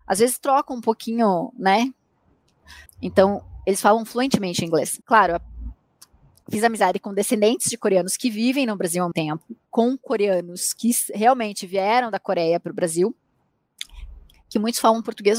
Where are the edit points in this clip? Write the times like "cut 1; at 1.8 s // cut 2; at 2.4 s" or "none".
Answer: cut 1; at 2.9 s // cut 2; at 5.0 s // cut 3; at 9.1 s